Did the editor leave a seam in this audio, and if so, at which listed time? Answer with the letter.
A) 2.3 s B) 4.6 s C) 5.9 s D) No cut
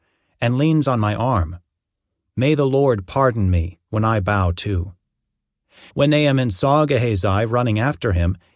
C